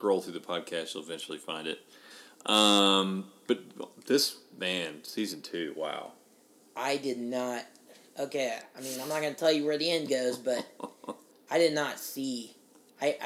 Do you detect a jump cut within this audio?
no; 0 cuts

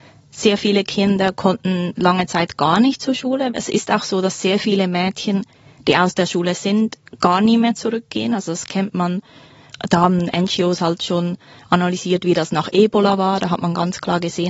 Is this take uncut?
yes; 0 cuts

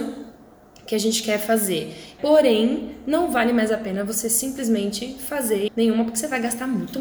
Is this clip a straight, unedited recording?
no; 2 cuts; at 2.2 s, 5.7 s

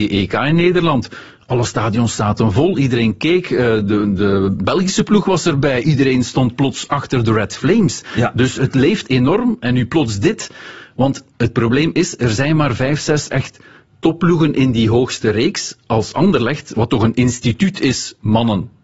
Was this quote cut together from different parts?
no; 0 cuts

